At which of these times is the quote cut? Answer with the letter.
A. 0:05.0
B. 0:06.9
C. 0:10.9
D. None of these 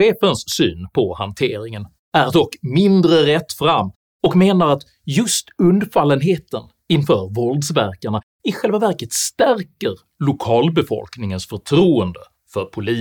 D